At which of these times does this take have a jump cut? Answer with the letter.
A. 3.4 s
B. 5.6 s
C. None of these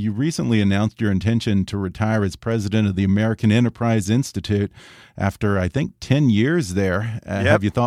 C